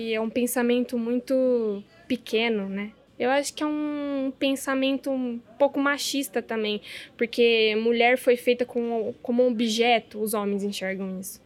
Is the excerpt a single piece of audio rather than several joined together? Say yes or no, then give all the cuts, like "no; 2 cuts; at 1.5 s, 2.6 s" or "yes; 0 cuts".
no; 1 cut; at 3.1 s